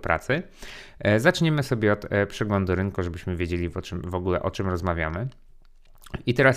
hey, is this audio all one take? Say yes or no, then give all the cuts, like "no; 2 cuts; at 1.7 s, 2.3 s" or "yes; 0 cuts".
yes; 0 cuts